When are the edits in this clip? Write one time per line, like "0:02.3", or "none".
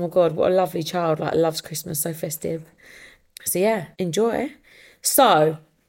0:03.9